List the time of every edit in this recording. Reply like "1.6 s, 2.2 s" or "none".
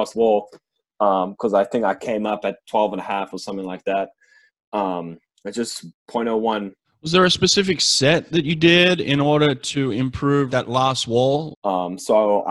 6.8 s, 10.5 s, 11.5 s